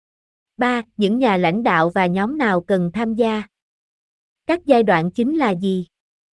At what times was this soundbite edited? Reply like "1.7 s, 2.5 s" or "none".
none